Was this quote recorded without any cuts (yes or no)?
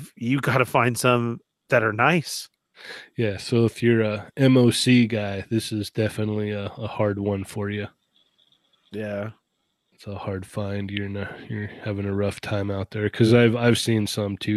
yes